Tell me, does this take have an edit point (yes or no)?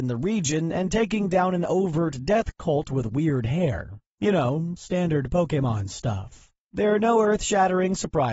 no